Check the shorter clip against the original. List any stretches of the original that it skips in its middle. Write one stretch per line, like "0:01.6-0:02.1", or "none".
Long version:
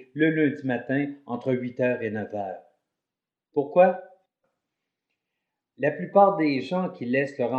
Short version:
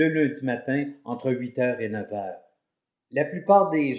0:03.2-0:05.6

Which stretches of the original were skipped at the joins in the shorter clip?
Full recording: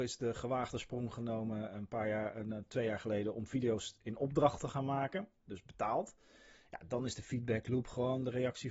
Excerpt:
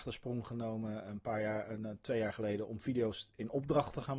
none

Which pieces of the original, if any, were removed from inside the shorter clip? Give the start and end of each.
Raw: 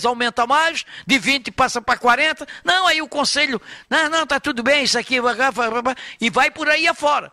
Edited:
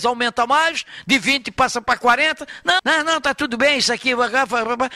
0:02.8-0:03.8

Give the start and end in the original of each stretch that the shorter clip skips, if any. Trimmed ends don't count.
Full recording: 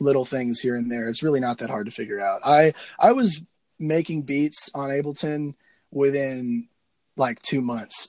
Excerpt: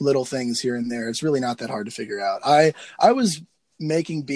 none

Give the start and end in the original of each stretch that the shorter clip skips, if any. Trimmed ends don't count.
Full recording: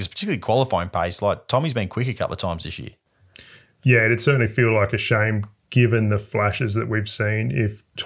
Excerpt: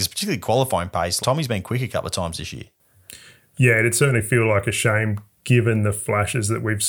0:01.2-0:01.5

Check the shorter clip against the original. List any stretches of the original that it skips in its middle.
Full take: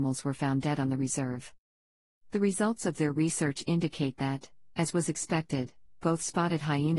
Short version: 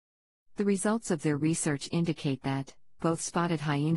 0:04.7-0:06.0

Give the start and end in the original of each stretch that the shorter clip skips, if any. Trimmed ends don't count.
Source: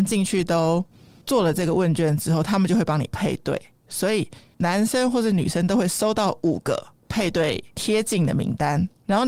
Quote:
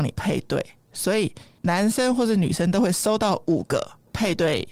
none

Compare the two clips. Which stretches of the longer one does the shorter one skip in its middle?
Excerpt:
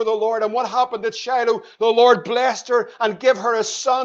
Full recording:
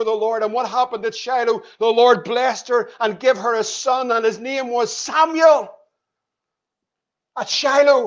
none

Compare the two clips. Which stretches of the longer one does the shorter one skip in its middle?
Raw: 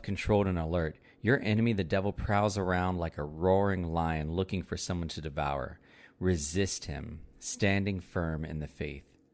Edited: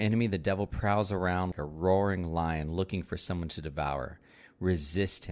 0:03.0-0:03.1

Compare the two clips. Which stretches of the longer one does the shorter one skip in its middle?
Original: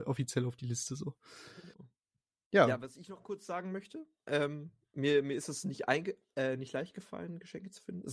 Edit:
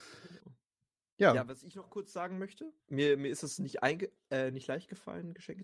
0:04.1-0:04.8

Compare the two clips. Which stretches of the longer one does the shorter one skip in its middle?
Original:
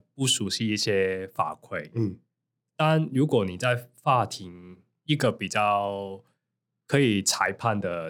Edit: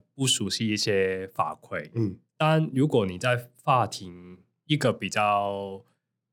0:02.3-0:02.7

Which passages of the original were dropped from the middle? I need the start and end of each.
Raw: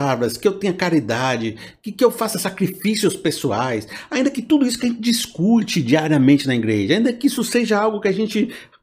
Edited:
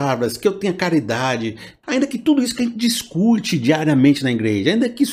0:01.8-0:04.1

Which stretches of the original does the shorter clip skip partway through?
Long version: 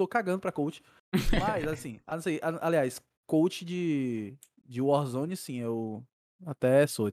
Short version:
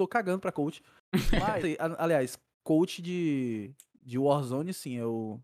0:01.6-0:02.2

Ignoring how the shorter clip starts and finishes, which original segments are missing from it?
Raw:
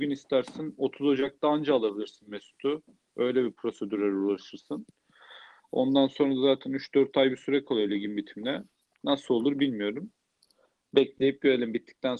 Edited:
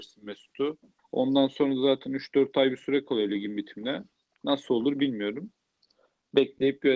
0:03.0-0:05.6

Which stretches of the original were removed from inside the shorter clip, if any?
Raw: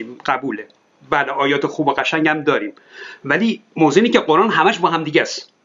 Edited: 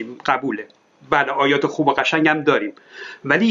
none

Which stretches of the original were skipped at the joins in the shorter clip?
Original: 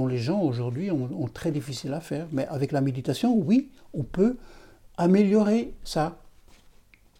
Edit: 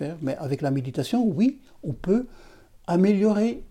none

